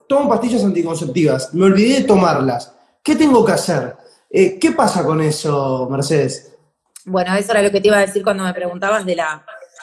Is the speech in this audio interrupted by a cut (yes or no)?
no